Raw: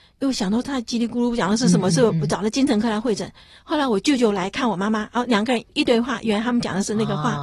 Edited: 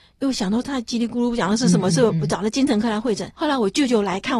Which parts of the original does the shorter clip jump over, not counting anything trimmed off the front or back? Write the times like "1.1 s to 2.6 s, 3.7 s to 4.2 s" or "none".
3.3 s to 3.6 s